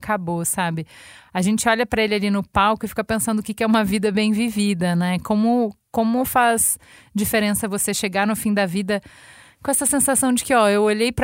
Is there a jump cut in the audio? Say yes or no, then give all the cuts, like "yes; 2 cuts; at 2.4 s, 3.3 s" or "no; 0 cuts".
no; 0 cuts